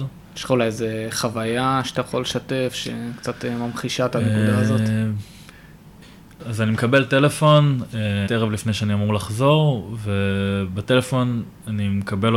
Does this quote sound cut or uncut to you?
cut